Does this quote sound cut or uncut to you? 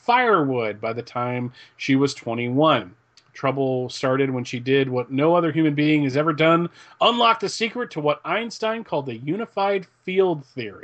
uncut